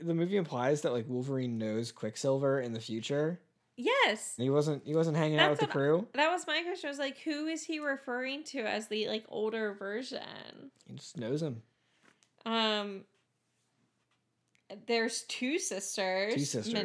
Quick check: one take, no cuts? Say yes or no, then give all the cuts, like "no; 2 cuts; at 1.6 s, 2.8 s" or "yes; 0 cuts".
no; 1 cut; at 4.4 s